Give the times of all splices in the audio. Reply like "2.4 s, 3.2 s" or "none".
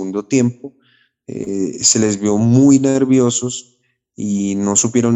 none